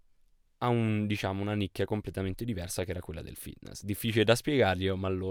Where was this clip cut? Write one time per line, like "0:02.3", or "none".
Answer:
none